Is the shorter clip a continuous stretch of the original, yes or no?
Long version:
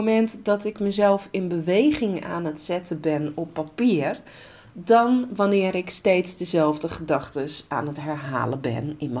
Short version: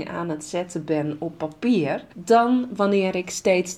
no